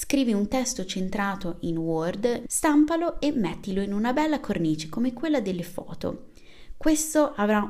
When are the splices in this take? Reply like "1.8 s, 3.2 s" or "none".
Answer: 2.4 s